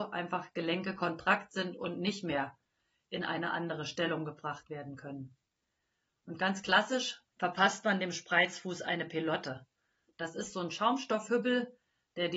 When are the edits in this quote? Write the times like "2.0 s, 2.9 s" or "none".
none

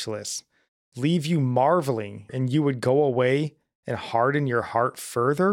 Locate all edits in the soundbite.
2.3 s

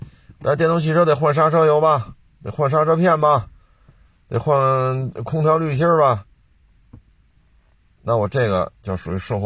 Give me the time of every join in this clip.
none

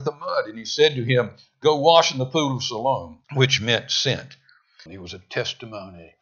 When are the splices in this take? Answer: 3.2 s, 4.9 s

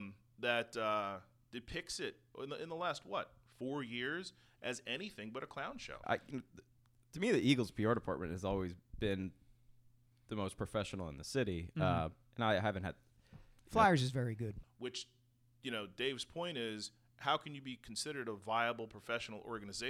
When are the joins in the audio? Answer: 6.0 s, 14.6 s

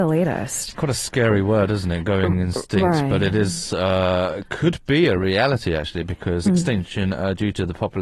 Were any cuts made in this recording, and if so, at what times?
6.5 s

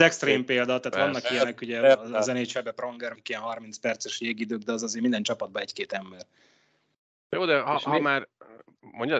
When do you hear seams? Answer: 3.1 s

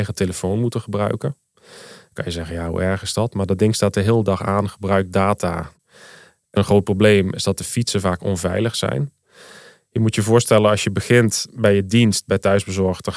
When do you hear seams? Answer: none

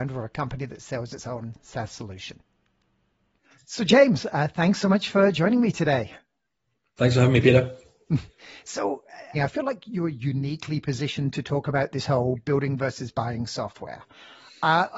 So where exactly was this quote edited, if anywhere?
9.3 s

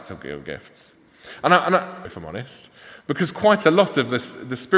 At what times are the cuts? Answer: 2.0 s

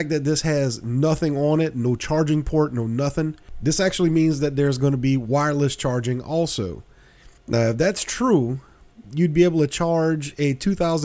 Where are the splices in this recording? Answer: 7.4 s, 9.0 s

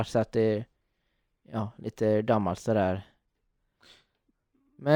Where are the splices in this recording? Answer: none

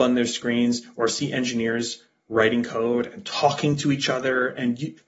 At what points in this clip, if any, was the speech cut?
none

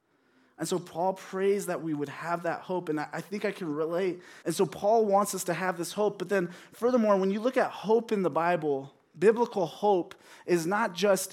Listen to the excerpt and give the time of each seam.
4.4 s

